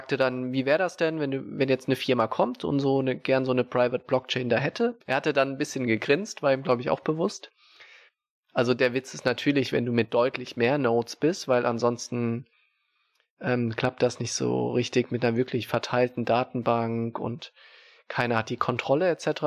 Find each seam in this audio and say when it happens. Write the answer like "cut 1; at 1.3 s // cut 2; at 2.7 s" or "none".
cut 1; at 5.0 s